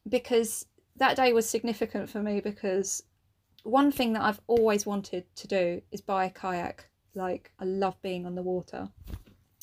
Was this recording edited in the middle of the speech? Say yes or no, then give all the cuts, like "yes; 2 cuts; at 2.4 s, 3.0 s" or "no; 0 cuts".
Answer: yes; 1 cut; at 7.6 s